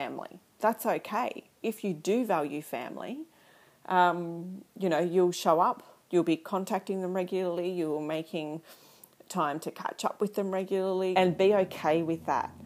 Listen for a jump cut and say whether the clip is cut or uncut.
cut